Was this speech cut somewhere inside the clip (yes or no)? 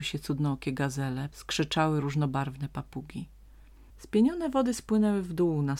yes